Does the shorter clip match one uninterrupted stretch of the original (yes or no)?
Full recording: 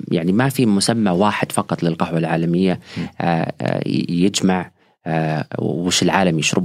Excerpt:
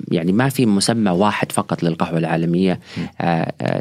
yes